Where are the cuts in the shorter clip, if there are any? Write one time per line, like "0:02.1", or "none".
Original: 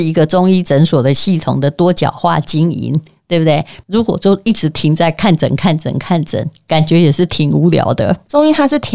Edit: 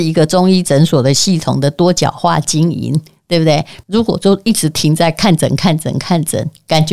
none